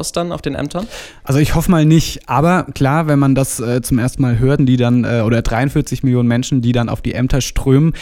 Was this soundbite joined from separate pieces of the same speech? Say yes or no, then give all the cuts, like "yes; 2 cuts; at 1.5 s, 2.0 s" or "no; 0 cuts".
yes; 1 cut; at 4.6 s